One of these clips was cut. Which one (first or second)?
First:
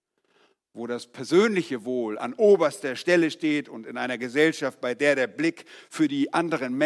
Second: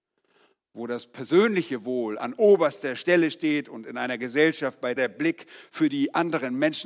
second